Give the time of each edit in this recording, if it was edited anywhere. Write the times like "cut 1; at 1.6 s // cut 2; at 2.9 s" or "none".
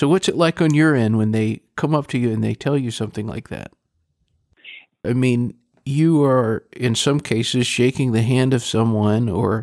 cut 1; at 5.0 s